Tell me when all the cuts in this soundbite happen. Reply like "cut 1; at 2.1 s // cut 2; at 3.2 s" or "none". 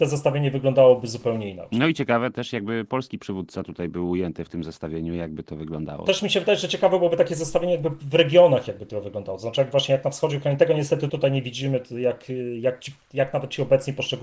cut 1; at 11.1 s